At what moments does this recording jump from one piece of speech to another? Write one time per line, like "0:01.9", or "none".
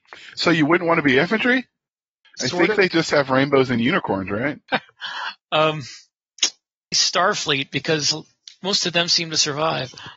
0:02.2
0:04.7
0:06.9